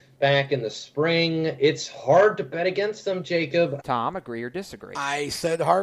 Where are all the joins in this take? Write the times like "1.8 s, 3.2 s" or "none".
3.8 s